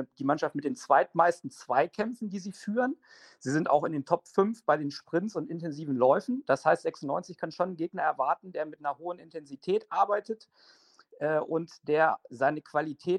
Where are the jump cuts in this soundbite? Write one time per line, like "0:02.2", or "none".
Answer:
none

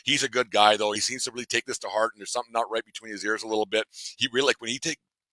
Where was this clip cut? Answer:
0:01.0

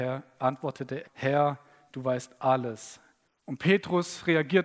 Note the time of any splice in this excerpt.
0:01.0
0:03.2

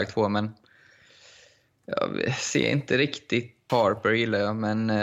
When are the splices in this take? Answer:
0:03.7

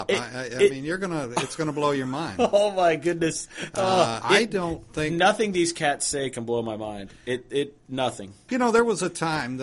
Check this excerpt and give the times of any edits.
0:04.2
0:08.5

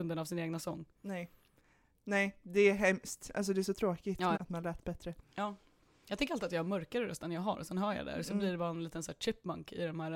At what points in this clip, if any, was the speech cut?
0:04.3

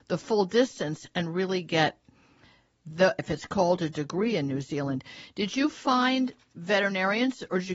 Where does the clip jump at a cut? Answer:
0:03.2

